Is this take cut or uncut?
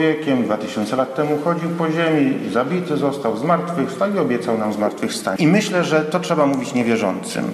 cut